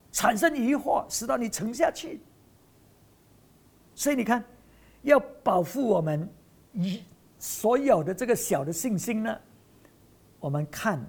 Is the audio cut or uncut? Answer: uncut